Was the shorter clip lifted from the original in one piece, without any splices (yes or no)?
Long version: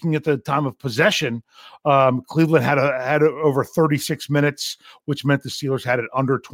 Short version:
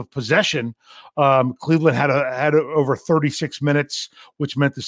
yes